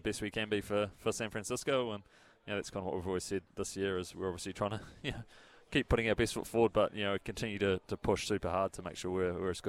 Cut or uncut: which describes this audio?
uncut